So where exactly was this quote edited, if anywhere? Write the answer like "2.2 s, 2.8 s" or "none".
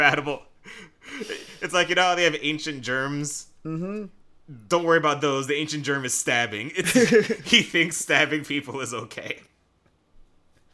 none